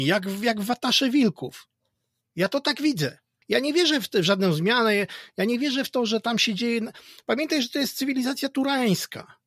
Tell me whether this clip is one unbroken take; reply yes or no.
yes